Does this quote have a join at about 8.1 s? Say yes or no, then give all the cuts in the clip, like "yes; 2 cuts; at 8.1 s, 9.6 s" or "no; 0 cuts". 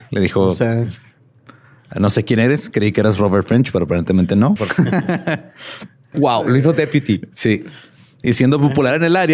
no; 2 cuts; at 4.6 s, 6.1 s